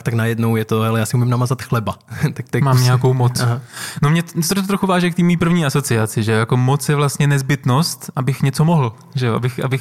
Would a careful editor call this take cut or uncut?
uncut